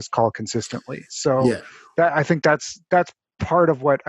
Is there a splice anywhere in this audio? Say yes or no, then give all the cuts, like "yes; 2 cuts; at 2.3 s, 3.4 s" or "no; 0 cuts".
no; 0 cuts